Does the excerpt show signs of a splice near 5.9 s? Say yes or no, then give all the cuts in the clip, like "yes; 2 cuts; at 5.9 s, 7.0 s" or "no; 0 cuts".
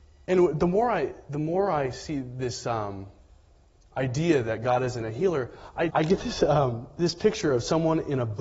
yes; 1 cut; at 5.9 s